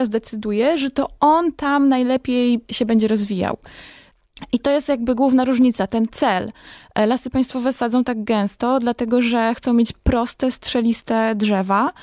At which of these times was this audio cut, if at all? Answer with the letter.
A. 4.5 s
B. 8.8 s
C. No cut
C